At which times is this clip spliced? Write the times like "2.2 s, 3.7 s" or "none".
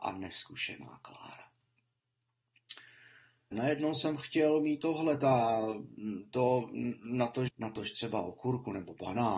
3.5 s, 7.5 s